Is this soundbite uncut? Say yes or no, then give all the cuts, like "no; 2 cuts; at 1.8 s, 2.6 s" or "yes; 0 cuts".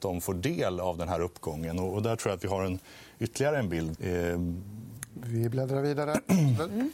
no; 1 cut; at 4.0 s